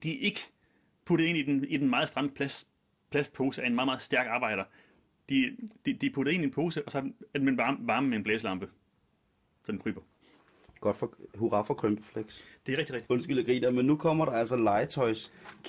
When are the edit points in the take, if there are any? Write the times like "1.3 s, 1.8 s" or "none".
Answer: 13.1 s